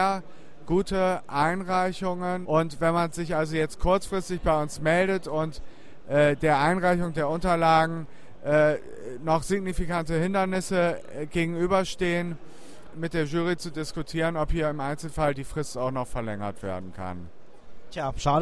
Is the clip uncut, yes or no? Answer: no